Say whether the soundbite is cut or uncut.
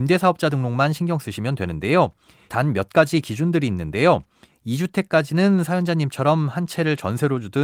cut